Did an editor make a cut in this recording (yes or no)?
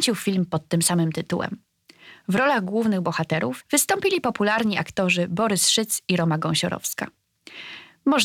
yes